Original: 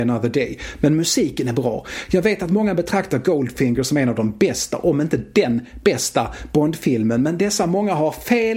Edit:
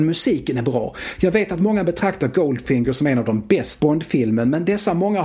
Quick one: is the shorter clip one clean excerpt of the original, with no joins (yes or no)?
no